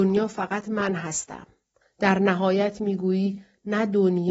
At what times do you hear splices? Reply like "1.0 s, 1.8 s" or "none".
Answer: 1.8 s